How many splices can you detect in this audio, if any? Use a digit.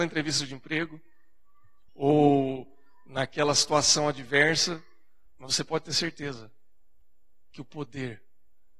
1